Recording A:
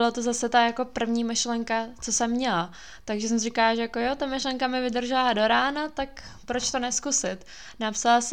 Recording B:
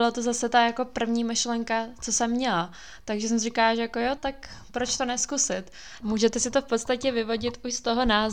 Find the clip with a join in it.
B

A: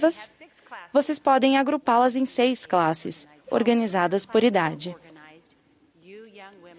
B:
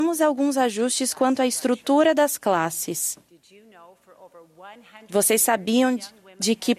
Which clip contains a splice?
A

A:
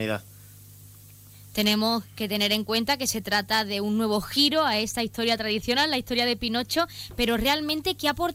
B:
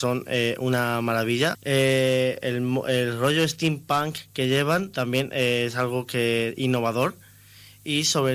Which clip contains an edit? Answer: B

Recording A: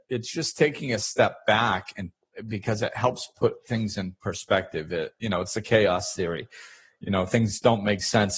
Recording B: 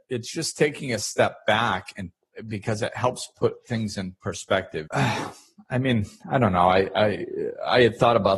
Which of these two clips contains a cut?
B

